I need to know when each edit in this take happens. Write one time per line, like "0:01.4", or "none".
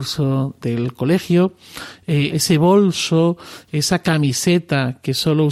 0:02.3